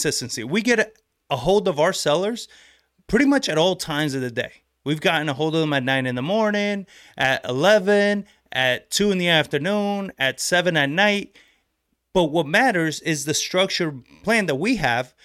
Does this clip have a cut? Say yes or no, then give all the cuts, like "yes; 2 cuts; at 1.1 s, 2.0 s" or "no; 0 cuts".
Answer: no; 0 cuts